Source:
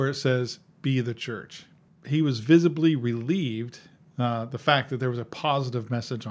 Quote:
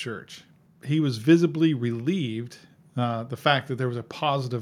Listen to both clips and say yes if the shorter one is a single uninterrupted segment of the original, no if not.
yes